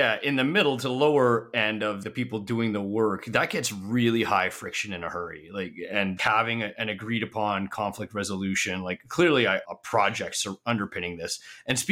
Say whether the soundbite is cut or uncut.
cut